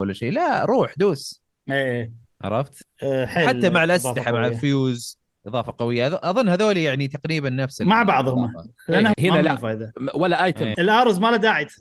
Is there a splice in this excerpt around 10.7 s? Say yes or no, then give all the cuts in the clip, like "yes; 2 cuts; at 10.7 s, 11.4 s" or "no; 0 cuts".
yes; 2 cuts; at 9.1 s, 10.7 s